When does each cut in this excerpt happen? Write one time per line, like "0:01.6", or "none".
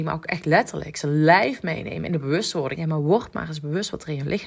0:02.7